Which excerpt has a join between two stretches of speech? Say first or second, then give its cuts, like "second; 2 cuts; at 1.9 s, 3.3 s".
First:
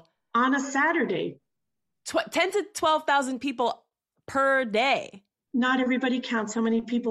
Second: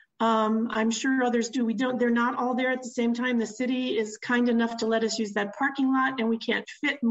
first; 1 cut; at 5.5 s